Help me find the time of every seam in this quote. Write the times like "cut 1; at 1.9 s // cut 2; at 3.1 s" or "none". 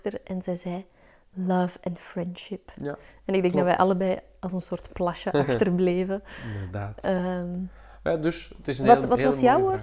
none

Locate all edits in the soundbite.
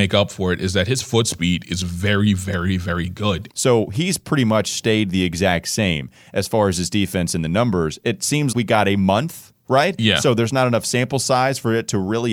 cut 1; at 3.5 s // cut 2; at 8.5 s

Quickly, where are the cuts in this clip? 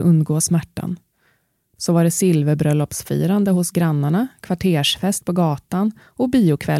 cut 1; at 1.8 s

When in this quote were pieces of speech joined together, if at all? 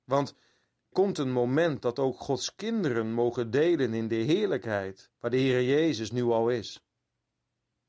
cut 1; at 0.9 s // cut 2; at 5.2 s

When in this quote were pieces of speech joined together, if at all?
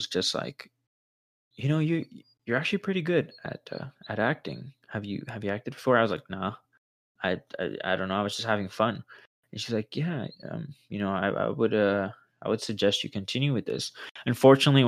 none

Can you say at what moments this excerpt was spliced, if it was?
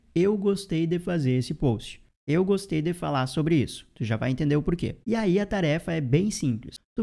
cut 1; at 5.0 s

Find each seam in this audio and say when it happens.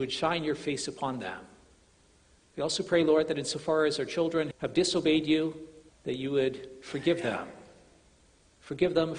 cut 1; at 4.5 s // cut 2; at 5.9 s

